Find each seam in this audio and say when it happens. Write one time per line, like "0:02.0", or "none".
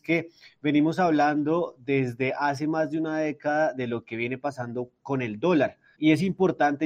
0:05.9